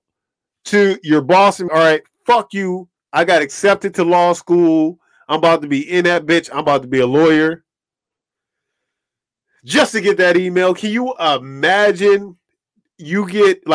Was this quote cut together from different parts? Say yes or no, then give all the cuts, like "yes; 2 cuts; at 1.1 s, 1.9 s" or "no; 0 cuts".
yes; 2 cuts; at 1.7 s, 3.0 s